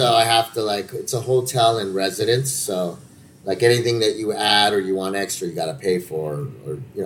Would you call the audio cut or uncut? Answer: uncut